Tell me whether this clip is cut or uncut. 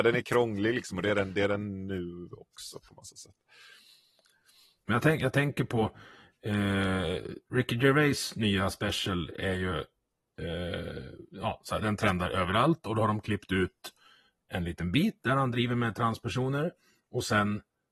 cut